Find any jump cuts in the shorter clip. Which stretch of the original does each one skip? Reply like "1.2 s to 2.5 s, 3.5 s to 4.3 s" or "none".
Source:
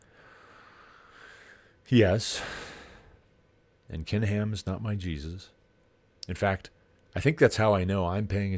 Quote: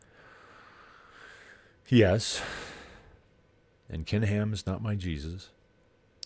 none